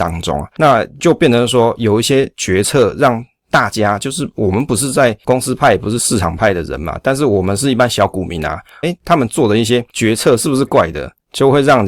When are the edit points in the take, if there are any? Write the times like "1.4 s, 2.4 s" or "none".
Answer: 8.8 s, 10.7 s